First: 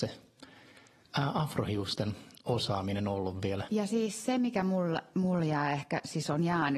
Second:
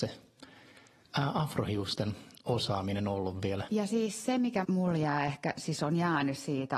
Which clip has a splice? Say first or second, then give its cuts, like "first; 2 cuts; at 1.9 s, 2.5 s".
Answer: second; 1 cut; at 4.6 s